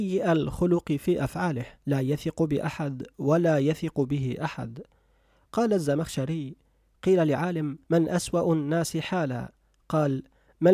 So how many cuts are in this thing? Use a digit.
2